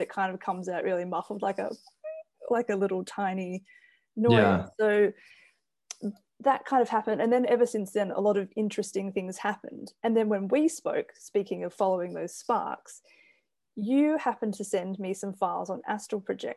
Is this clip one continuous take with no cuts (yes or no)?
yes